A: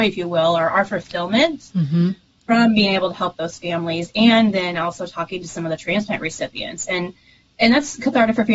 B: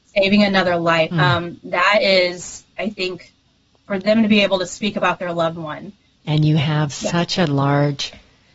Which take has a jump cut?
B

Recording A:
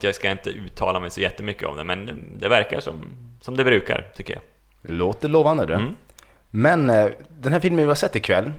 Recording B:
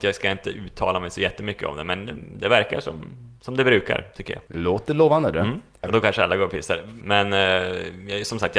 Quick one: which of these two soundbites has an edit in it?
B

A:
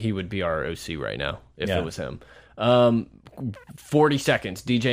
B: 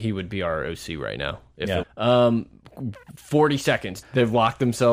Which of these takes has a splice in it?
B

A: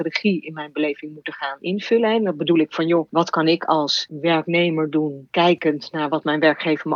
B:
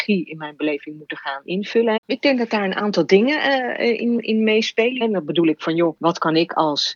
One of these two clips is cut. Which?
B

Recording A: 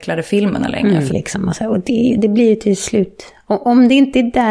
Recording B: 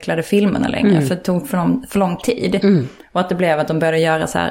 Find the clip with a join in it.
A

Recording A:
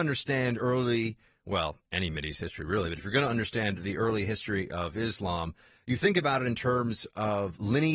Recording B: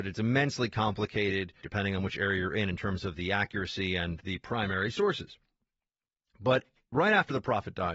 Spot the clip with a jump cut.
B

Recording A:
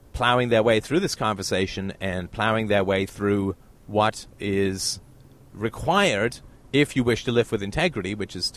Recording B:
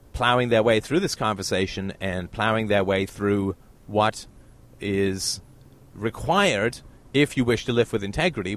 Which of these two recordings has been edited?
A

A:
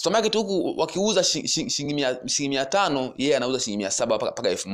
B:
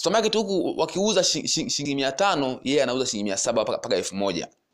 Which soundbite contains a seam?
B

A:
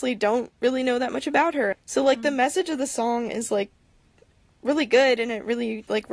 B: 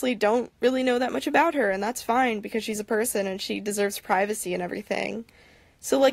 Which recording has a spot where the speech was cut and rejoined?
A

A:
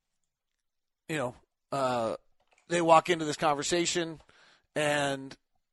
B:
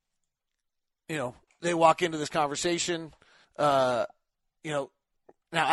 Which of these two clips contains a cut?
B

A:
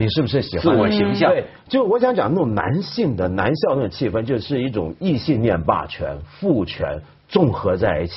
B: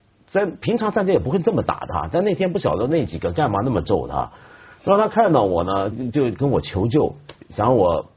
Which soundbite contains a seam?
B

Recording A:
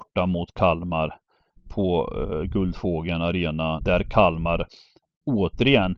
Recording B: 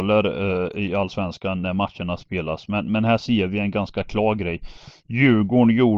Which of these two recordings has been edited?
A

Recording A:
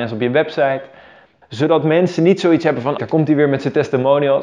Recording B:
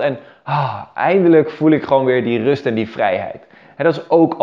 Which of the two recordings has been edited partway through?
A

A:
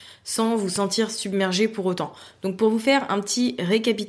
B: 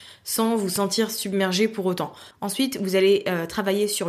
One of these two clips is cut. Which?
B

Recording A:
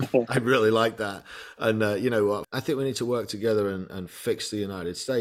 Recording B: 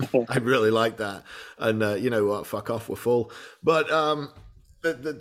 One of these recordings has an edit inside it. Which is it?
A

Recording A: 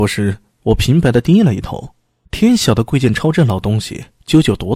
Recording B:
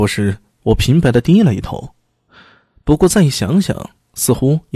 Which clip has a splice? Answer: A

